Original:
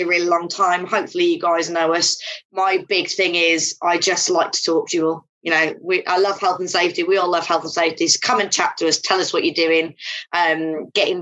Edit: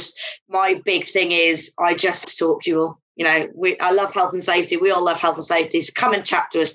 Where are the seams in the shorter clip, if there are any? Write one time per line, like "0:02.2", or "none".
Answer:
0:02.2